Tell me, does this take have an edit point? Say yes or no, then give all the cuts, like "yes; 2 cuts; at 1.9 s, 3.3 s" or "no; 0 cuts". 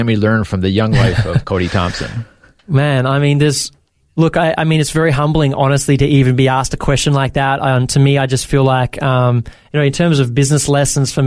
no; 0 cuts